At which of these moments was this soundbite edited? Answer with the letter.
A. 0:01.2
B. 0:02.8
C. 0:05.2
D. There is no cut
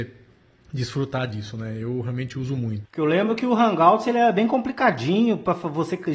B